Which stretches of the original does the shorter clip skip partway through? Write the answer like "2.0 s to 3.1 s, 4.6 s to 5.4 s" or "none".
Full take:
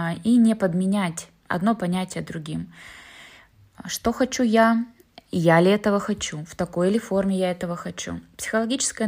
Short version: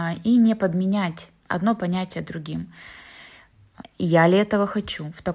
3.8 s to 5.2 s